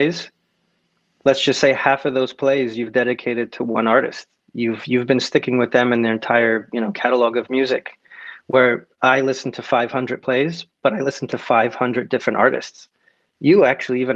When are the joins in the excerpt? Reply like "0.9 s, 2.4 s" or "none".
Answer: none